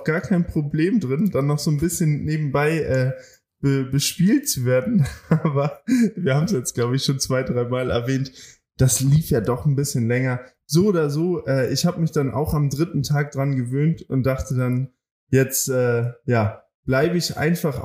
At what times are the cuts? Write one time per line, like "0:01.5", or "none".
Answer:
none